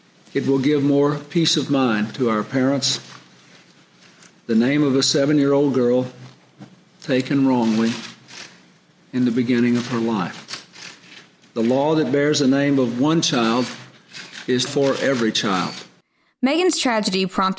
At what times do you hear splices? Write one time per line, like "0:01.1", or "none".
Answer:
0:04.3
0:14.7